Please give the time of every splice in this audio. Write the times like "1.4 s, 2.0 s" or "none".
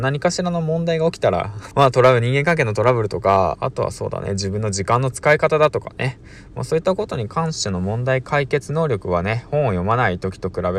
1.7 s, 3.6 s